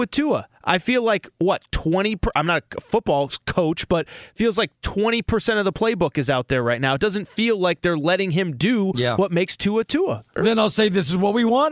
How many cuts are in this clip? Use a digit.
1